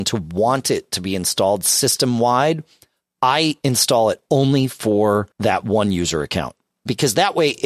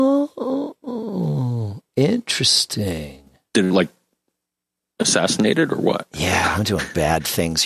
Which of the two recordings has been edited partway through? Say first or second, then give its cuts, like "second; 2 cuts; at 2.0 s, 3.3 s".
first; 1 cut; at 5.3 s